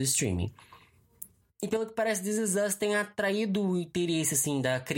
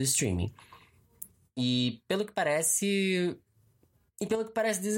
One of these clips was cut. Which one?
first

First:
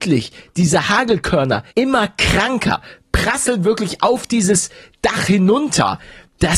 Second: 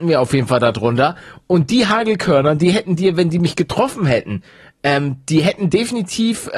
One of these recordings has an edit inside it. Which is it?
first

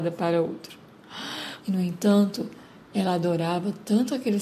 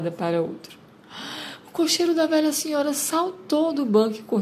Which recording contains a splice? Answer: first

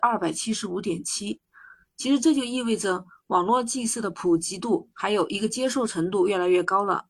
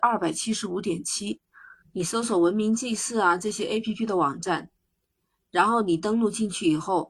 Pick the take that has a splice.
second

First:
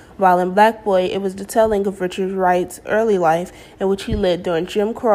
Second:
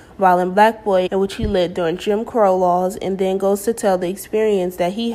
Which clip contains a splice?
second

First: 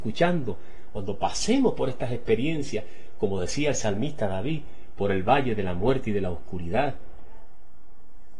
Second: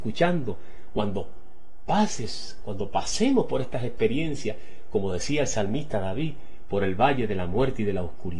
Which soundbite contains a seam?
first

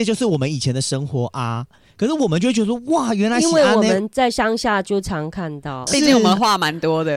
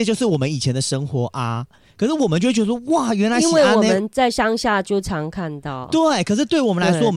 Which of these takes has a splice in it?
first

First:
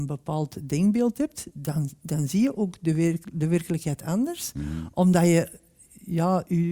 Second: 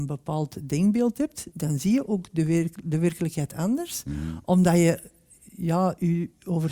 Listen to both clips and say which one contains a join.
second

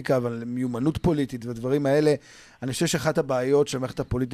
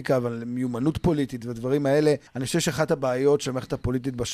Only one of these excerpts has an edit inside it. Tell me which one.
second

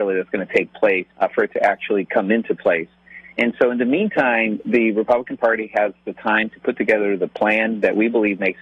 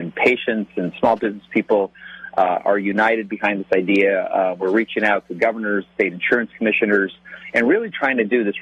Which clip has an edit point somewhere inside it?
first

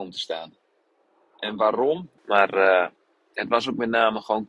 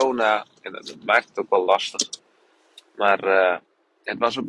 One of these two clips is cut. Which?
first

